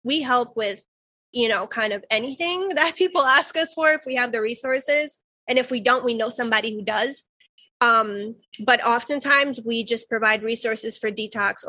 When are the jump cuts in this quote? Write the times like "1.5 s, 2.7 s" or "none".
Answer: none